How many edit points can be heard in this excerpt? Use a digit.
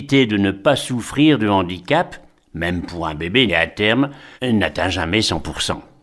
1